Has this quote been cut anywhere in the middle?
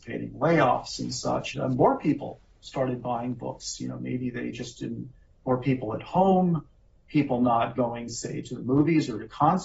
yes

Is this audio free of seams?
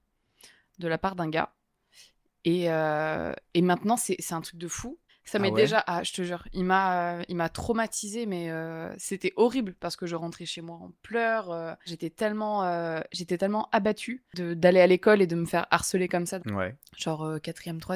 no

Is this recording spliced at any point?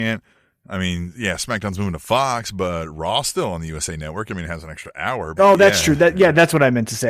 yes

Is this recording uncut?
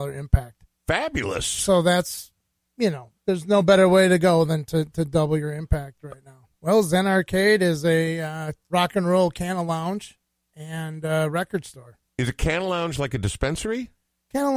no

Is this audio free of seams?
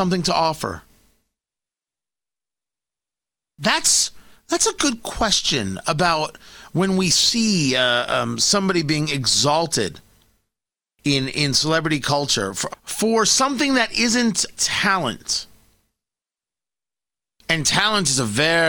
no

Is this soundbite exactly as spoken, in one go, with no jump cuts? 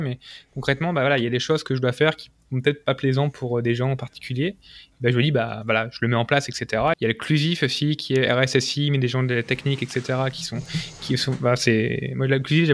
no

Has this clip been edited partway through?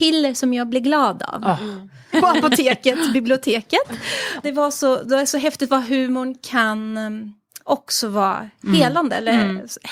yes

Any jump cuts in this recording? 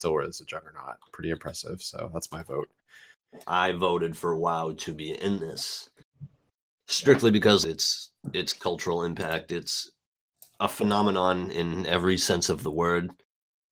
yes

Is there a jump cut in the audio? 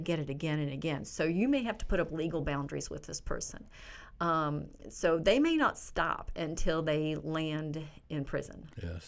no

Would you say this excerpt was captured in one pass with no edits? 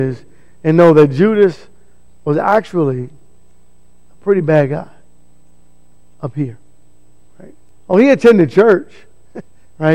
yes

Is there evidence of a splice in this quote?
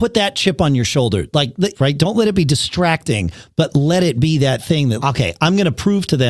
yes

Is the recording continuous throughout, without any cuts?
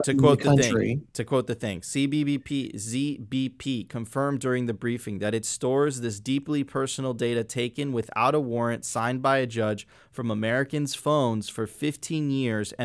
yes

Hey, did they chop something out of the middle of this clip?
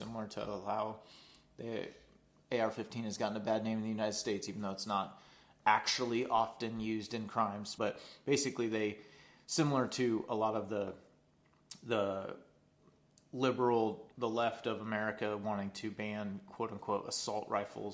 yes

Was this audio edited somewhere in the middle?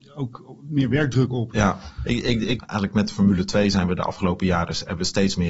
yes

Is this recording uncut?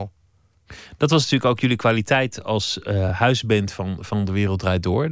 yes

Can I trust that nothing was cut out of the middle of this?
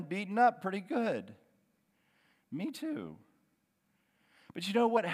no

